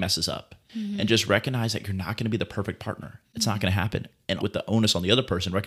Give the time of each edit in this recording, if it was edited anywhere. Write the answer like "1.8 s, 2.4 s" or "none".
4.4 s